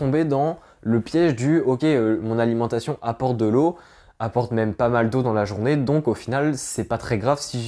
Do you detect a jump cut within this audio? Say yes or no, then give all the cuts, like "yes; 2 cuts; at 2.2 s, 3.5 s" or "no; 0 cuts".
no; 0 cuts